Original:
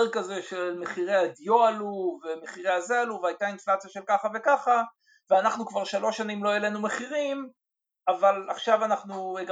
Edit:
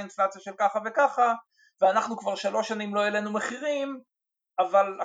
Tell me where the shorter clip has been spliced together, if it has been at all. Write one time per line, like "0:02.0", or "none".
none